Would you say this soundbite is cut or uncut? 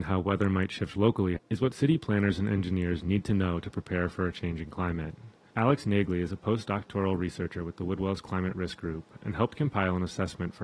cut